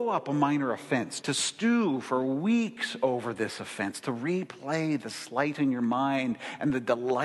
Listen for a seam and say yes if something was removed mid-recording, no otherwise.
yes